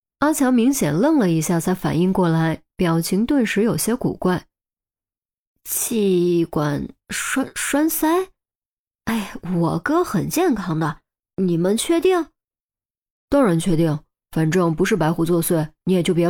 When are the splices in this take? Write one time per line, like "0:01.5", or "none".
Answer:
none